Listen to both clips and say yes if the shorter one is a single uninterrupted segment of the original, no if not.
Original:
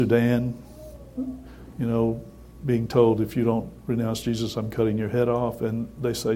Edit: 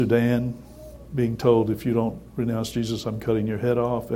no